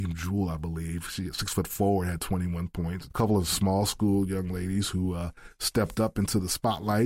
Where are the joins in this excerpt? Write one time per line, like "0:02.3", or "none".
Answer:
0:03.1